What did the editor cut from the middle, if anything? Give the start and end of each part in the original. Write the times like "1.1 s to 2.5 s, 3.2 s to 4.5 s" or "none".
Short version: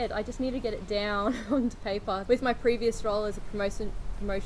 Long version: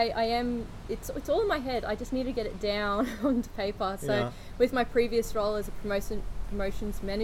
4.0 s to 4.6 s